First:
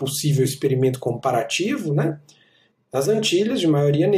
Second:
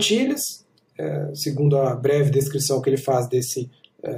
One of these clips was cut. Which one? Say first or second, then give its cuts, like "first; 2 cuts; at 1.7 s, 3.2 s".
first; 1 cut; at 2.7 s